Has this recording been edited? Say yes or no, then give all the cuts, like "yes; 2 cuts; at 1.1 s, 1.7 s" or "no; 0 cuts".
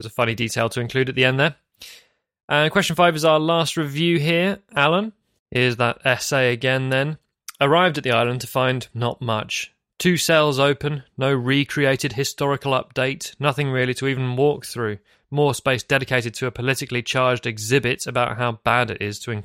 yes; 2 cuts; at 5.4 s, 8.9 s